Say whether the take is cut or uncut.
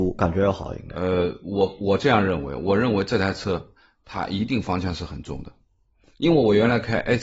uncut